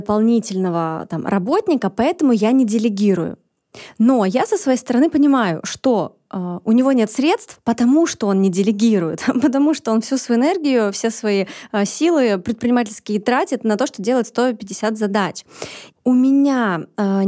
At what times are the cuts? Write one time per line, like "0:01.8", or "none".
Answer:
0:15.9